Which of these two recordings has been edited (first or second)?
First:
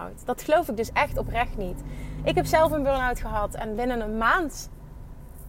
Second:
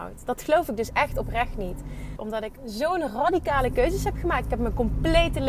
second